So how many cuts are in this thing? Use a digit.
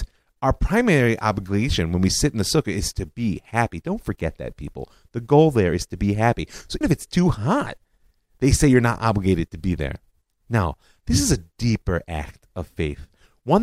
1